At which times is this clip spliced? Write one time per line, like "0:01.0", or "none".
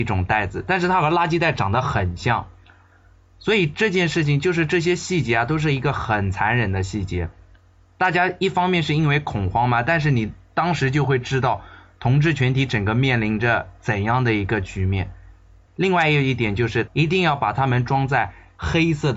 0:15.7
0:16.9